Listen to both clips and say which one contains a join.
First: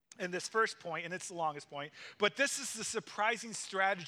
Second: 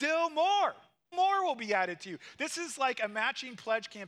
second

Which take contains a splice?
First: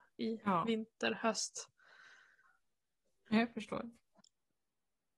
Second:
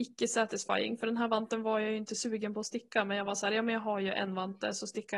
first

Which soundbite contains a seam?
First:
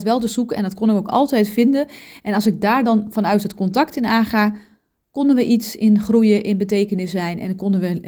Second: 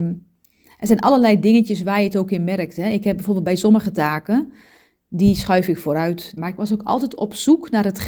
second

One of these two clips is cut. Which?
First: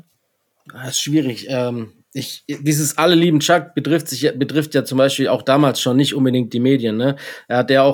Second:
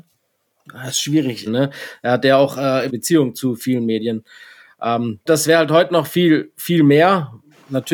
second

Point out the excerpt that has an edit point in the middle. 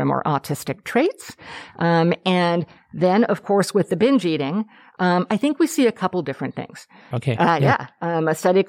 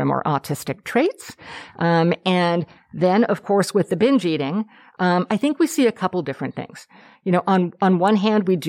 first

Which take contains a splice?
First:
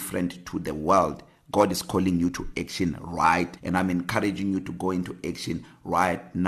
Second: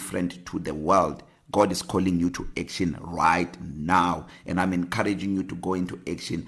first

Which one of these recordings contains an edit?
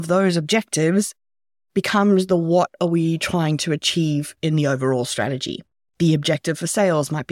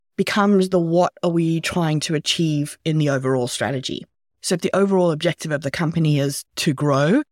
first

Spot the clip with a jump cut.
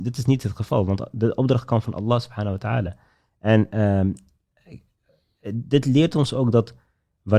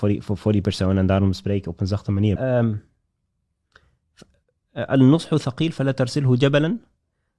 second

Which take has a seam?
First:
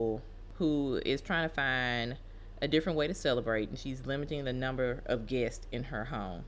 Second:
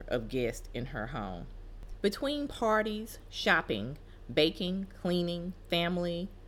second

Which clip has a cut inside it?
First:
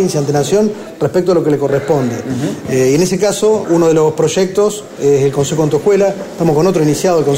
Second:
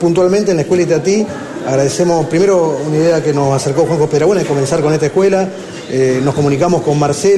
first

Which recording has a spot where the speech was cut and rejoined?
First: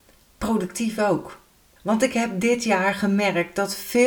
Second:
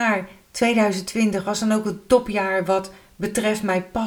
first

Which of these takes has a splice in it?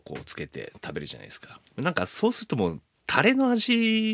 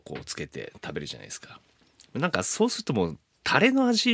first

